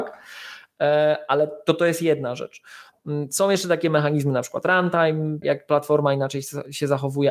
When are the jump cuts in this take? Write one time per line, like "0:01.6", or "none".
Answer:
0:05.4